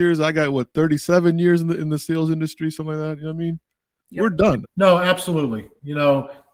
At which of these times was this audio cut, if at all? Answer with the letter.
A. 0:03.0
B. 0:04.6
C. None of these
B